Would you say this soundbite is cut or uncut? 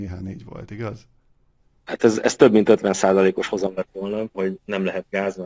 cut